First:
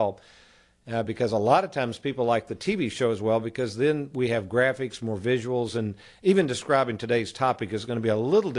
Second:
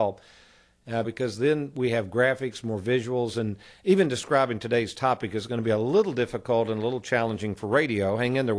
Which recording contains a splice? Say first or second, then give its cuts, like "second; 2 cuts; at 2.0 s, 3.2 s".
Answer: second; 1 cut; at 1.0 s